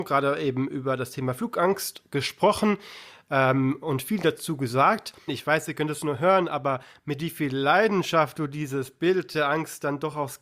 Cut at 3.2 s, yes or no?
no